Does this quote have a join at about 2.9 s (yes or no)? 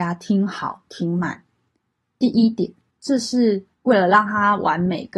yes